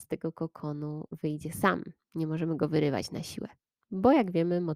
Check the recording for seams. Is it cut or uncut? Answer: uncut